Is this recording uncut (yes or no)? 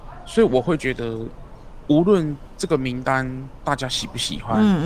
yes